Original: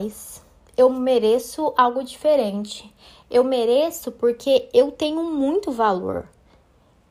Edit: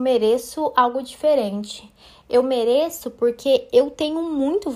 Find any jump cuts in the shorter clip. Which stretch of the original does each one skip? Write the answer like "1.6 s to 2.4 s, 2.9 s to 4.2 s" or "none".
none